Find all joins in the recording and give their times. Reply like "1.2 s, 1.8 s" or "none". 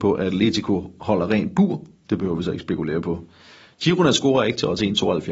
2.1 s